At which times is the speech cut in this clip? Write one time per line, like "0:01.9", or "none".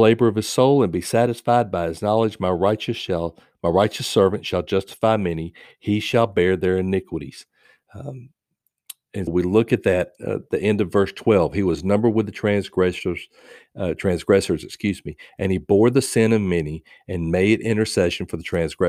0:09.3